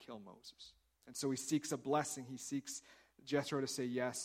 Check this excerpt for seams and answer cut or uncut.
cut